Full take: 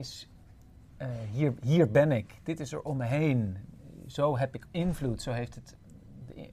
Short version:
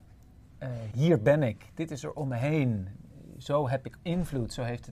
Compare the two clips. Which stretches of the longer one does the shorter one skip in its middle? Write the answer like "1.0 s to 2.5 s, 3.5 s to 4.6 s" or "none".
1.3 s to 1.6 s

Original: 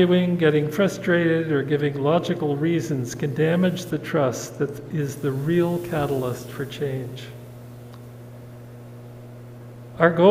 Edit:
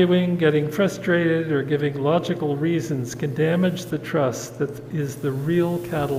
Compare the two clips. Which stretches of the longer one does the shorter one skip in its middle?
none

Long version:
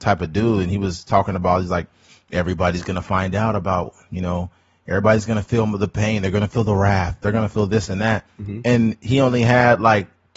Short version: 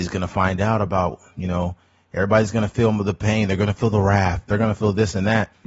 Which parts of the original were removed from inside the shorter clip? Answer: none

